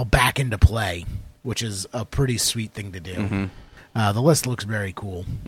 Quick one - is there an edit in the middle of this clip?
no; 0 cuts

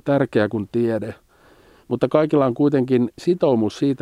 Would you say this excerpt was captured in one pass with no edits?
yes; 0 cuts

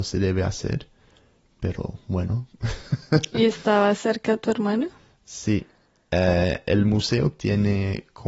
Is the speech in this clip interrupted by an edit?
no; 0 cuts

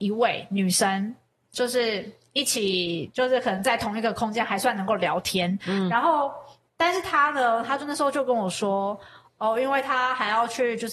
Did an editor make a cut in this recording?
yes; 1 cut; at 5.6 s

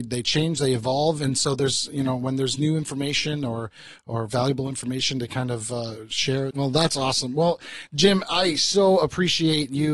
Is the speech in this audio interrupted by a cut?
yes; 1 cut; at 6.5 s

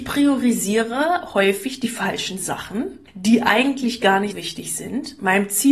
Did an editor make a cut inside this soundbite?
yes; 2 cuts; at 3.1 s, 4.3 s

